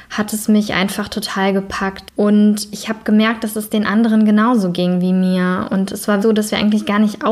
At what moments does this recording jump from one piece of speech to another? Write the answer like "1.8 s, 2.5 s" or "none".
2.1 s, 6.2 s